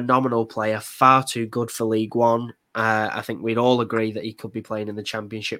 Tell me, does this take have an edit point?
no; 0 cuts

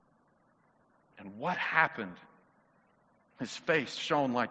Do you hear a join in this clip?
no; 0 cuts

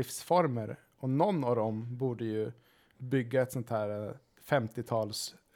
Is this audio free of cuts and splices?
yes; 0 cuts

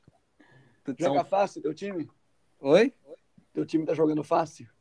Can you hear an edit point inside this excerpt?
no; 0 cuts

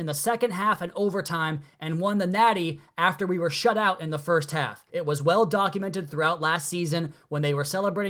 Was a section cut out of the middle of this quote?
yes; 1 cut; at 4.9 s

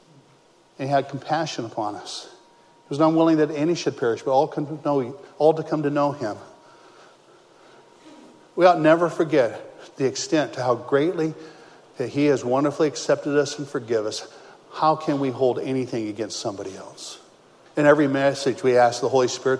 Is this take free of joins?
no; 1 cut; at 17.7 s

